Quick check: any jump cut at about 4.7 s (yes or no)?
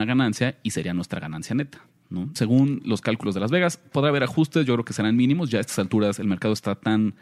no